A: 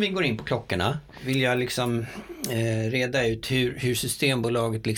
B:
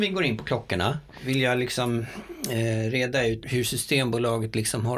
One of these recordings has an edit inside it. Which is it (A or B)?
B